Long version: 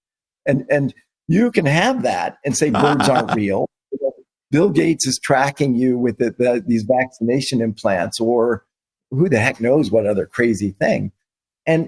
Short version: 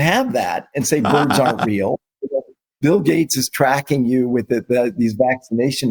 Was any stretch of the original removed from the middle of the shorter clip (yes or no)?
no